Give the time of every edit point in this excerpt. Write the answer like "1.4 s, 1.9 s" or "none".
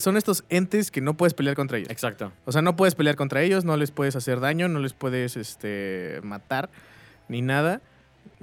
none